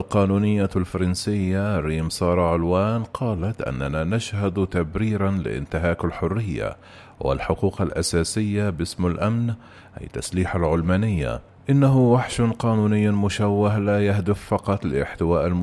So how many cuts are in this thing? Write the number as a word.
zero